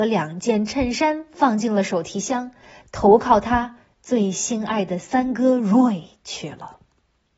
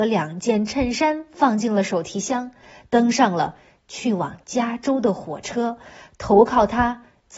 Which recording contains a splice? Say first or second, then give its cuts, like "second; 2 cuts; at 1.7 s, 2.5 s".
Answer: first; 1 cut; at 2.8 s